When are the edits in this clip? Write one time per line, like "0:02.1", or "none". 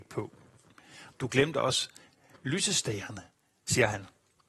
0:01.1

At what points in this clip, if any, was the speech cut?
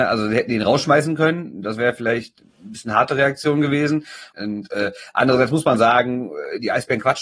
0:02.5
0:04.3

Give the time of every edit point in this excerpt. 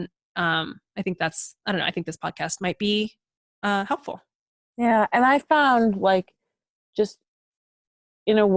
none

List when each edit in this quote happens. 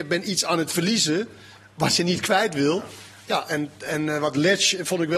none

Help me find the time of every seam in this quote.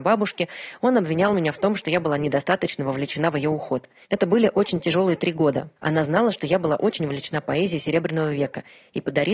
0:04.0
0:05.8

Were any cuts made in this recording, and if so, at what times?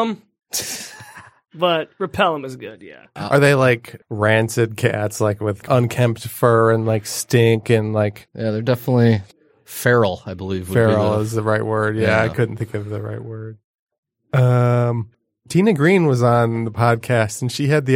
0:05.6
0:08.3

